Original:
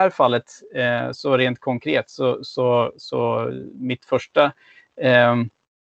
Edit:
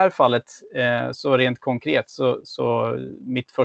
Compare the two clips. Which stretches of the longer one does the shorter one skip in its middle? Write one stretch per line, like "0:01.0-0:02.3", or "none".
0:02.4-0:02.9